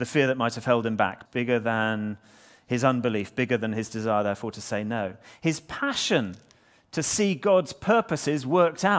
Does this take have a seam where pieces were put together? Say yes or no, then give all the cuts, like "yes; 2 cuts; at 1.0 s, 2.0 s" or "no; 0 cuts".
yes; 1 cut; at 1.3 s